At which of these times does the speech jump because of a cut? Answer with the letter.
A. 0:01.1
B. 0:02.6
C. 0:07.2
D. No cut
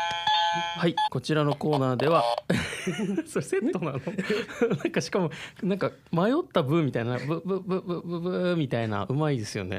A